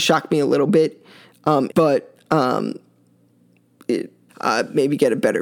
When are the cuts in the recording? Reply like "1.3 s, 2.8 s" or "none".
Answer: 1.7 s, 4.3 s